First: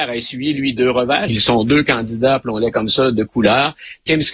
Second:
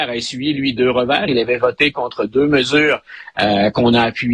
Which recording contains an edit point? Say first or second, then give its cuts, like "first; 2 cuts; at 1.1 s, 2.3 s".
first; 1 cut; at 1.3 s